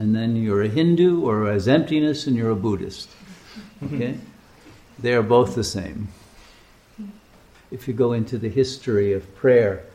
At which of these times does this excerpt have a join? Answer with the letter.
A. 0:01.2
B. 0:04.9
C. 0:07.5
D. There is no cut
C